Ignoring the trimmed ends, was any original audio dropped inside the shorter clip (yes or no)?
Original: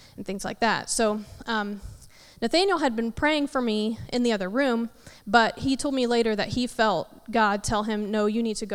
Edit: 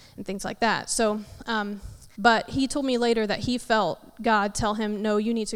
yes